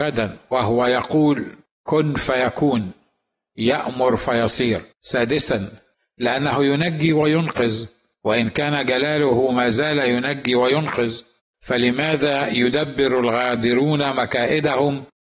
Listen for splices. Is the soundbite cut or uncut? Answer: cut